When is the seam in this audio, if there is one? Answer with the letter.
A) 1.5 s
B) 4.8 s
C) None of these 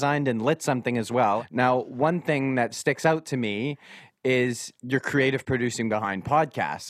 B